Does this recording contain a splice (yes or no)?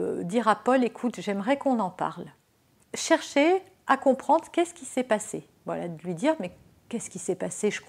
no